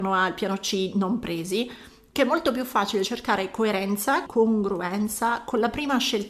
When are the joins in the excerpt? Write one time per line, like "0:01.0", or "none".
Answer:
0:04.3